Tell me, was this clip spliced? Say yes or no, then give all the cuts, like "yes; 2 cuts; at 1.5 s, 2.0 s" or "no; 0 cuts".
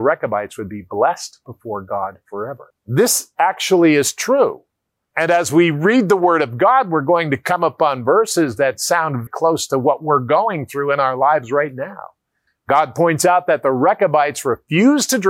yes; 3 cuts; at 2.7 s, 9.3 s, 12.5 s